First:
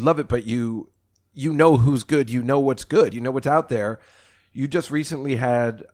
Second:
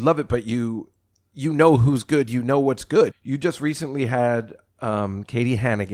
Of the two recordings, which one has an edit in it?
second; 1 cut; at 3.1 s

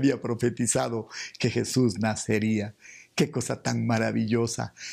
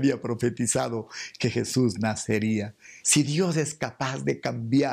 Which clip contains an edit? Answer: second; 1 cut; at 3.0 s

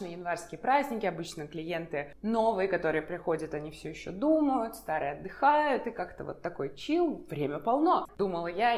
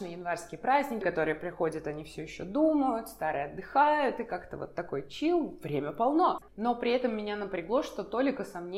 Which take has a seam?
second; 2 cuts; at 1.0 s, 6.5 s

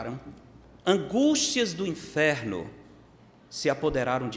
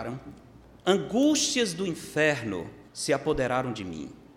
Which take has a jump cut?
second; 1 cut; at 2.9 s

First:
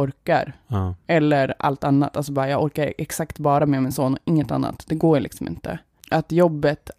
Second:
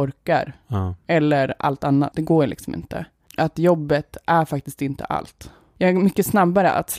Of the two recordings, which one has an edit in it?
second; 1 cut; at 2.1 s

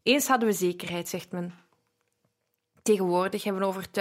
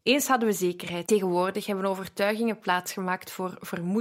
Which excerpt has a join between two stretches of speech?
second; 1 cut; at 1.1 s

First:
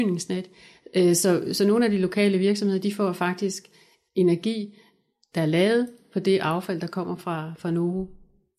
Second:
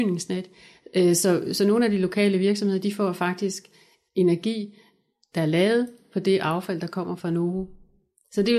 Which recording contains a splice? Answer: second; 1 cut; at 7.2 s

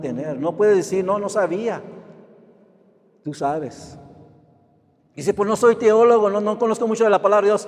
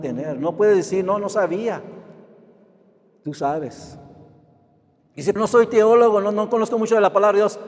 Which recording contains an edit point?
second; 1 cut; at 5.4 s

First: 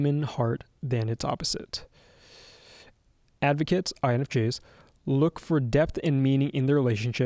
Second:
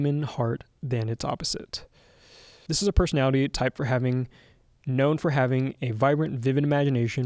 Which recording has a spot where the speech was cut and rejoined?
second; 1 cut; at 2.7 s

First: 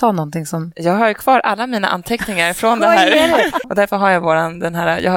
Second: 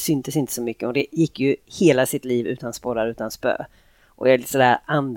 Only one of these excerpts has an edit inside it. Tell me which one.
first; 1 cut; at 3.6 s

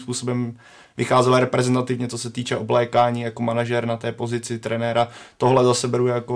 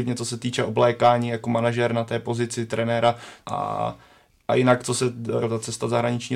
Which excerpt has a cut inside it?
second; 2 cuts; at 3.4 s, 5.4 s

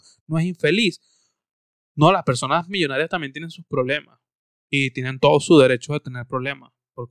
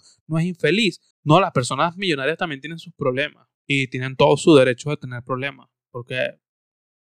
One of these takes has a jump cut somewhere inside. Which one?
second; 2 cuts; at 1.1 s, 3.6 s

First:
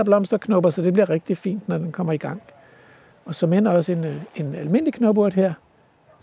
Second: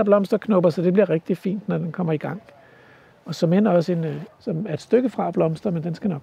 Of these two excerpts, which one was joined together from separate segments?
second; 1 cut; at 4.3 s

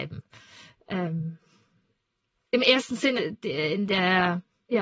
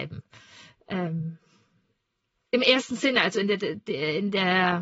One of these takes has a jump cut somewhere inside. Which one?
first; 1 cut; at 3.2 s

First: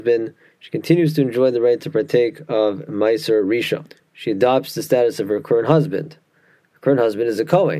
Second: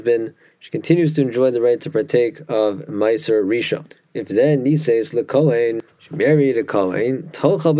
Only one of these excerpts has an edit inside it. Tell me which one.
first; 1 cut; at 4.0 s

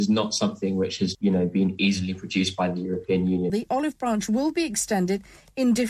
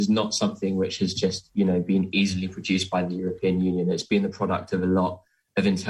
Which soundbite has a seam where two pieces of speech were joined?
first; 2 cuts; at 1.1 s, 3.5 s

